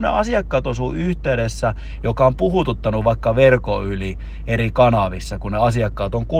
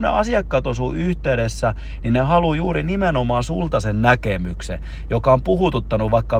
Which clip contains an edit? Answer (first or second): first